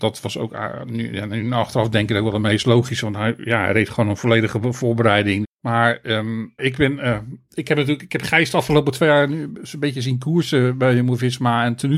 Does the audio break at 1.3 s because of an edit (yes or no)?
no